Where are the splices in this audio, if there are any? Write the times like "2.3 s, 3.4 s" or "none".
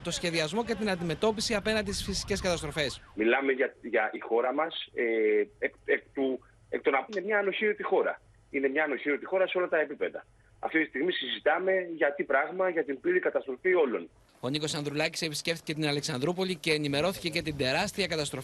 7.1 s

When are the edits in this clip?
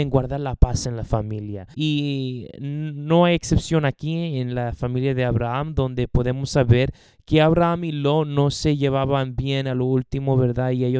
1.7 s

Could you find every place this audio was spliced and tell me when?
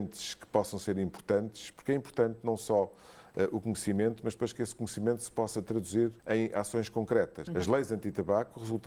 6.2 s, 7.5 s

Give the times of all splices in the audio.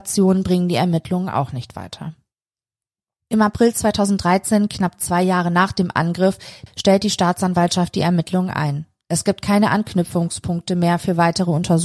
6.7 s

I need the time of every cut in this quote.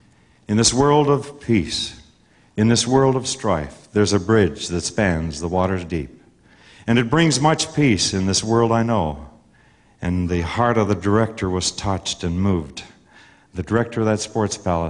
9.9 s

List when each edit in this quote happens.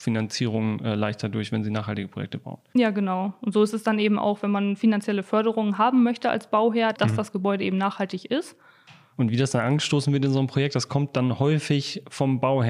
6.9 s, 9.1 s

